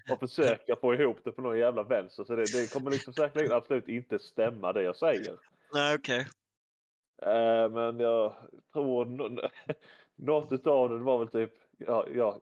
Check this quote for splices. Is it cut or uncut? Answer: uncut